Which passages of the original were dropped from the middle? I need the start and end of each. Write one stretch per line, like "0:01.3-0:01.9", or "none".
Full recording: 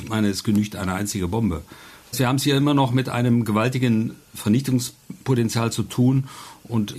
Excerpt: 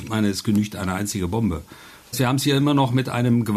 none